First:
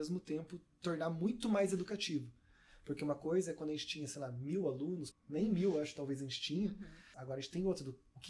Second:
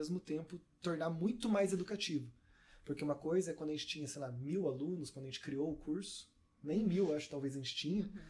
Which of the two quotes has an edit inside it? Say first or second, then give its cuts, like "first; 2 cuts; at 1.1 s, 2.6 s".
first; 2 cuts; at 5.1 s, 7.1 s